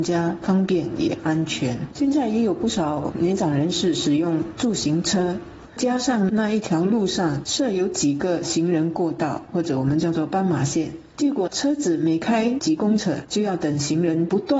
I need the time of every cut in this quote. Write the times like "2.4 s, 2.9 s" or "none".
1.9 s, 5.7 s